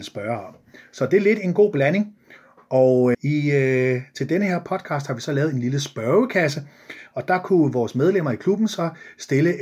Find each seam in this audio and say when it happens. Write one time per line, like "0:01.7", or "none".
0:03.1